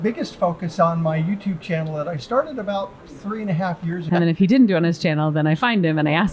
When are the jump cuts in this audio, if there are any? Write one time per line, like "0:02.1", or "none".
0:04.1